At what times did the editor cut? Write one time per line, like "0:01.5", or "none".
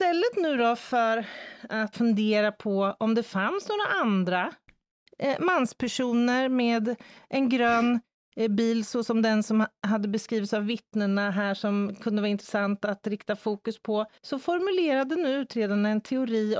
0:01.9
0:14.2